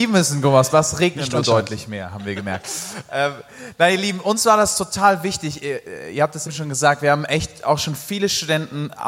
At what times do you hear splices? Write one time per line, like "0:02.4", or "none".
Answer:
0:06.5